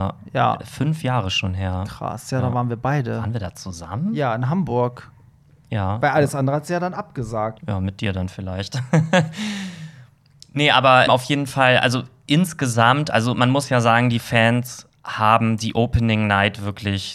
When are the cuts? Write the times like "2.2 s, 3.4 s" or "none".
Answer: 7.6 s, 11.1 s